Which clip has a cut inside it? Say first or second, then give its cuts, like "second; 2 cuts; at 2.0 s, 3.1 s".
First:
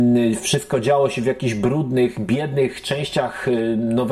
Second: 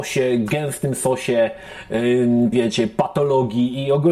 second; 1 cut; at 2.5 s